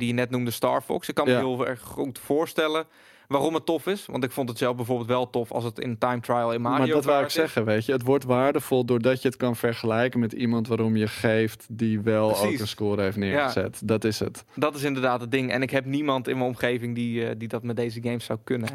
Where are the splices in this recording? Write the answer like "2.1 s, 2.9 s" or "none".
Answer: none